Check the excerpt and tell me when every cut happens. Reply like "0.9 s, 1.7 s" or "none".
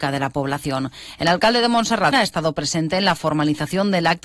2.1 s